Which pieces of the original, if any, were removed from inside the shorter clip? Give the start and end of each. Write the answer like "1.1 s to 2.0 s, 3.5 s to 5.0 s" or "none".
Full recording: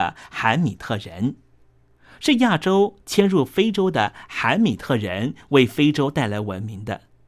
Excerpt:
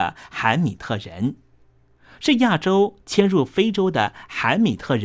none